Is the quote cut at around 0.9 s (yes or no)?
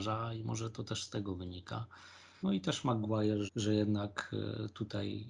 no